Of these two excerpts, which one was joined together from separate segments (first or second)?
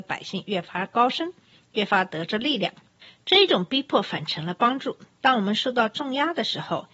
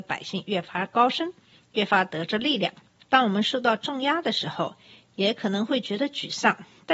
second